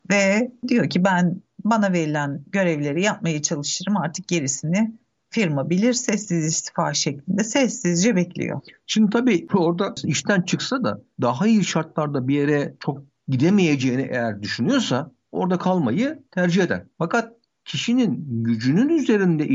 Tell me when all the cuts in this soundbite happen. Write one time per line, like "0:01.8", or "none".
none